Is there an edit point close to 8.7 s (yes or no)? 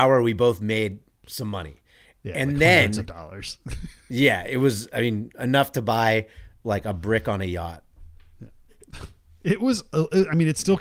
yes